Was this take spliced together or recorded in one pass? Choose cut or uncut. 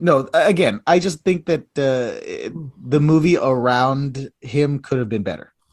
uncut